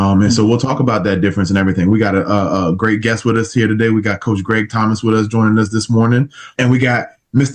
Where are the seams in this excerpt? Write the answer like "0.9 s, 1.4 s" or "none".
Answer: 6.6 s